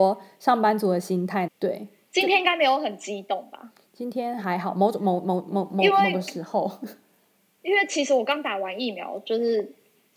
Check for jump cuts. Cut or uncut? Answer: cut